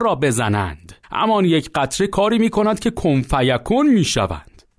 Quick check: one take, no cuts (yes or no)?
no